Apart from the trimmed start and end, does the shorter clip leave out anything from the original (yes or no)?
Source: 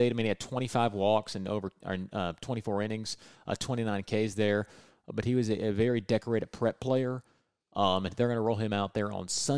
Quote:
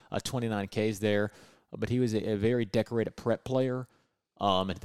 no